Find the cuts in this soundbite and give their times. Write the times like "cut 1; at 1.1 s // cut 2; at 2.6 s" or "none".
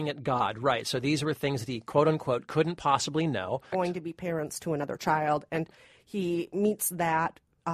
cut 1; at 3.7 s

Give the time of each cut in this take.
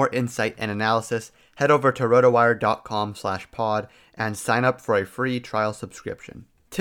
none

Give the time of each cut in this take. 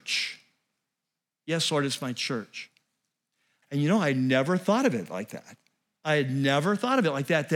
cut 1; at 3.6 s

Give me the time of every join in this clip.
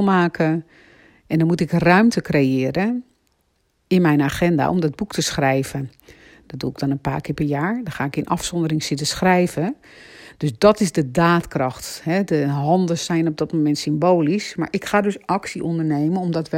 cut 1; at 6.4 s

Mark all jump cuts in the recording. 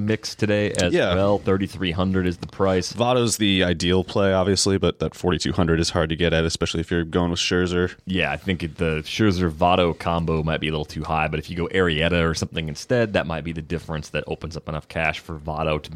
none

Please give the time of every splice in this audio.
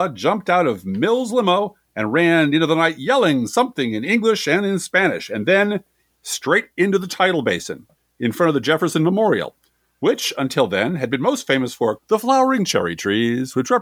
cut 1; at 12.0 s

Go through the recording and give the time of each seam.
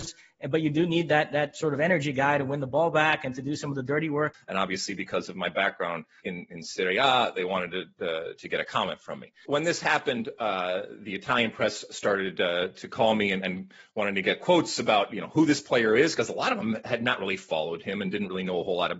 cut 1; at 4.3 s // cut 2; at 9.5 s

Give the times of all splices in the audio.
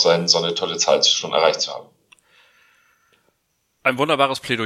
none

